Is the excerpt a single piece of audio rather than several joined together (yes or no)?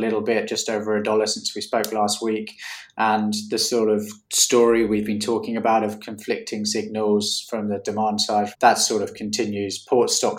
no